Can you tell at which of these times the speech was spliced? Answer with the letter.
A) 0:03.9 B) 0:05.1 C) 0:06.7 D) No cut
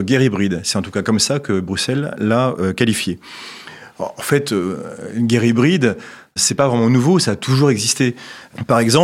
D